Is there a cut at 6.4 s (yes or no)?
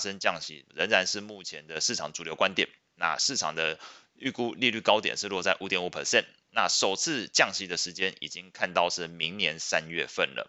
no